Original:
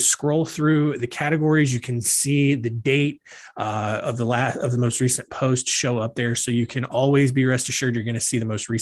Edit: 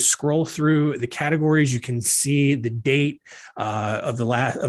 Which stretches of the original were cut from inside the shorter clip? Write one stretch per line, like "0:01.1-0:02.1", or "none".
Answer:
none